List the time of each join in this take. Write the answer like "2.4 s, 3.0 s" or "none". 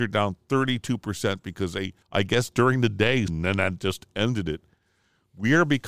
2.0 s, 3.3 s